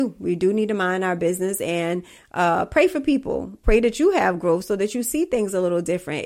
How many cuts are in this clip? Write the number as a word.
one